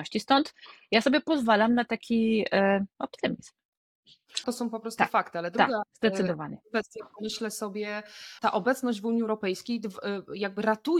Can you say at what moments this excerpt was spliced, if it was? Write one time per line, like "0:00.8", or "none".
0:04.4
0:08.4